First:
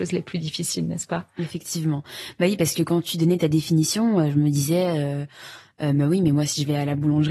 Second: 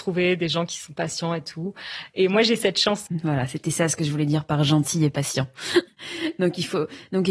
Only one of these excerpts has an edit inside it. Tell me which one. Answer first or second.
second